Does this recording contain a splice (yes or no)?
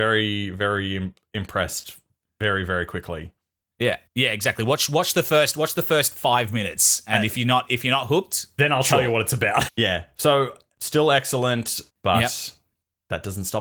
yes